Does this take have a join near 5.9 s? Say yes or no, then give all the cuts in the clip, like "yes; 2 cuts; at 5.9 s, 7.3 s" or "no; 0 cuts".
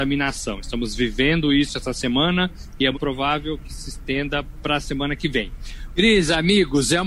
yes; 2 cuts; at 2.9 s, 5.9 s